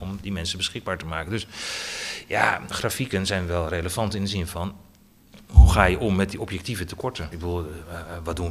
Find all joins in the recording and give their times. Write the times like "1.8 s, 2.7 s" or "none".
2.7 s, 7.3 s